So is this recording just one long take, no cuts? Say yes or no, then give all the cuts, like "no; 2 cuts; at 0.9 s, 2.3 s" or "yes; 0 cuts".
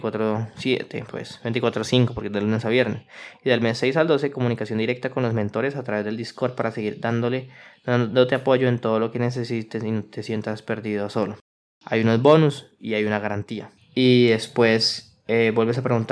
no; 1 cut; at 13.8 s